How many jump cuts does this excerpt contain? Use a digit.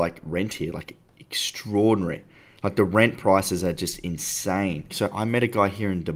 1